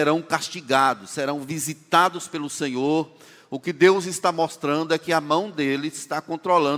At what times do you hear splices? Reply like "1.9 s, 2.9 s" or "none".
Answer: none

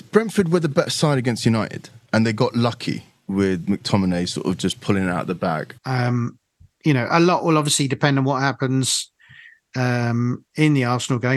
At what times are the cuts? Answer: 5.8 s

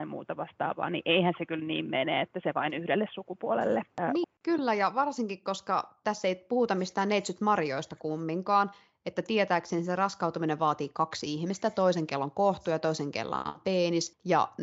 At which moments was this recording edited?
4.2 s

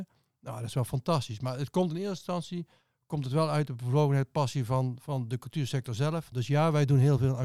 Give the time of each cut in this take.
6.3 s

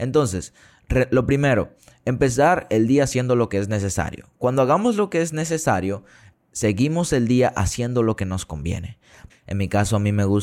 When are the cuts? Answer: 9.3 s

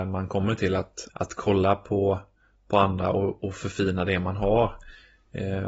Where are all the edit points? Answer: 1.1 s

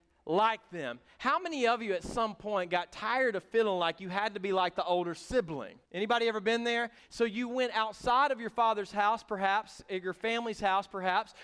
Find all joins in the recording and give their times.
5.9 s, 7.0 s

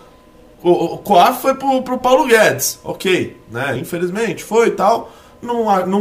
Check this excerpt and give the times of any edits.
none

